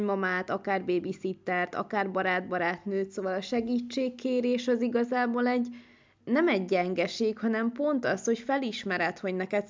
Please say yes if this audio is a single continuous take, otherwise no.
yes